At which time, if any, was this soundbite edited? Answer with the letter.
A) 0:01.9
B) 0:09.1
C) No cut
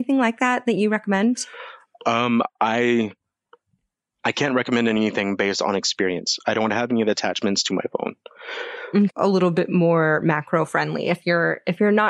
B